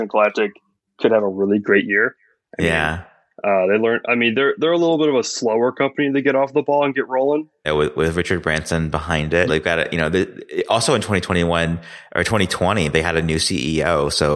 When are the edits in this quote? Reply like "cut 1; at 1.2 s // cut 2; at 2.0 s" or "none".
cut 1; at 7.6 s // cut 2; at 9.5 s